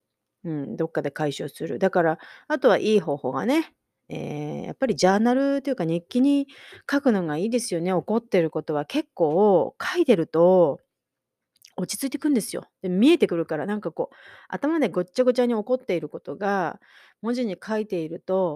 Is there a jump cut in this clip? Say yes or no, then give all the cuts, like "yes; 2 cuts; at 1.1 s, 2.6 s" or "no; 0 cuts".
no; 0 cuts